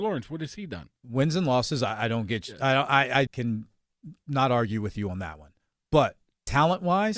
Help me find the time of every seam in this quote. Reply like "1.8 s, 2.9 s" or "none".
3.3 s